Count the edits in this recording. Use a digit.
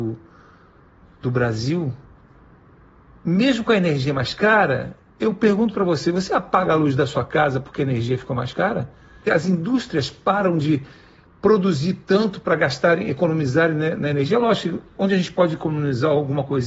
1